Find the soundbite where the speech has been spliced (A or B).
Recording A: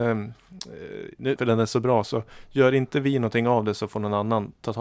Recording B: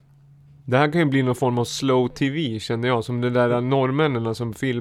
A